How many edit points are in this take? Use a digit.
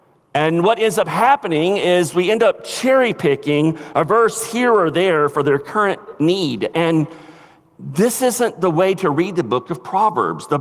0